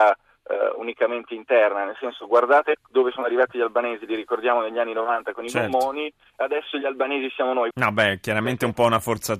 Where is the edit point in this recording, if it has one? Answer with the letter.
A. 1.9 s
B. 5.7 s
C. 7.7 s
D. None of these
C